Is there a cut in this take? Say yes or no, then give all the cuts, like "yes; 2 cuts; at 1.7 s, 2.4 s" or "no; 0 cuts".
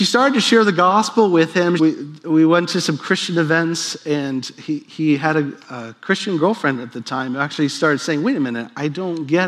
yes; 1 cut; at 1.8 s